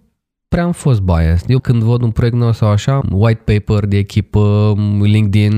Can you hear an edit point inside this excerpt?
yes; 2 cuts; at 1.6 s, 3.0 s

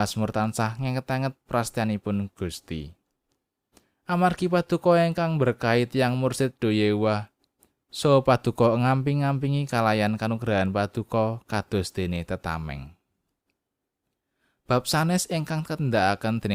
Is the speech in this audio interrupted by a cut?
no; 0 cuts

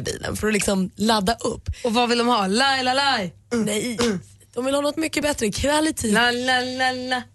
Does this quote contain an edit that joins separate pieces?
yes; 1 cut; at 5.0 s

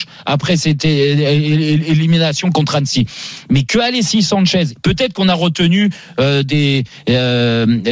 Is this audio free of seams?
no; 1 cut; at 4.8 s

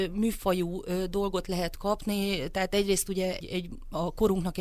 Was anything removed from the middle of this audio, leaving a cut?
yes; 1 cut; at 3.4 s

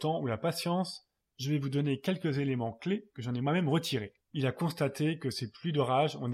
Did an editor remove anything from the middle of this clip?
yes; 1 cut; at 4.2 s

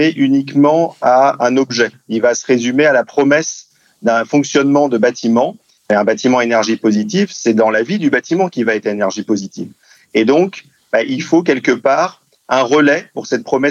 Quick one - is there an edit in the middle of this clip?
yes; 1 cut; at 5.8 s

